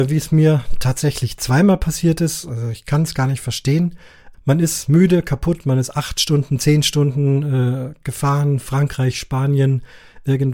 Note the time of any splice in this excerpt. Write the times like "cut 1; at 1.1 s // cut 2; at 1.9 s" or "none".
cut 1; at 4.3 s